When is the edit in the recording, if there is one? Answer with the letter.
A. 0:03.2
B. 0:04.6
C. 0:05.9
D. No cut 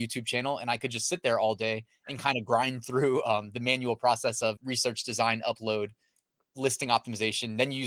B